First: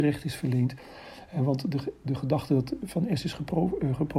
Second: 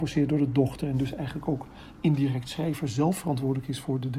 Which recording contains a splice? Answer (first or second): first